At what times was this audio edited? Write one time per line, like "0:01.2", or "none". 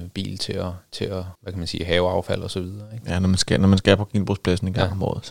0:01.3

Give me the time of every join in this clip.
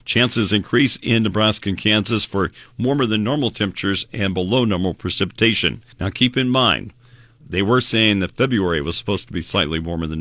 0:05.9
0:07.4

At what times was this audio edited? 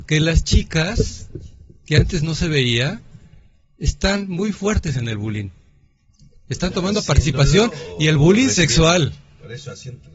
none

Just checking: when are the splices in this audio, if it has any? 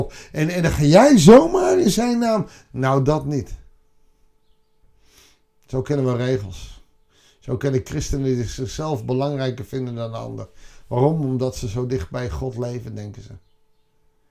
none

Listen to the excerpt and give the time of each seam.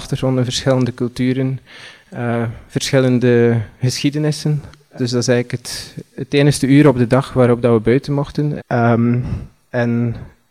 0:05.0
0:08.6

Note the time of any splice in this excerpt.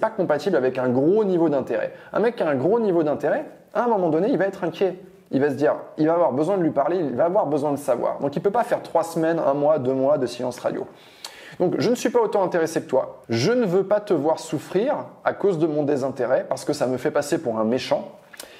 0:13.2

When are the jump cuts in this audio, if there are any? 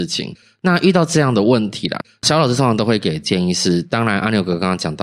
none

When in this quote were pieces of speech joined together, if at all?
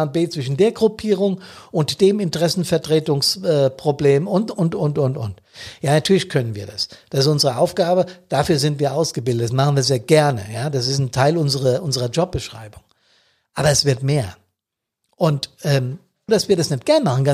0:16.3

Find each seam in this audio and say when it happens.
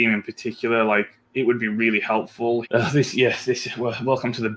0:02.6

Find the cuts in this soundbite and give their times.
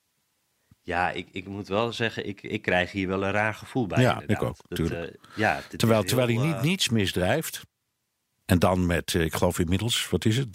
0:08.4

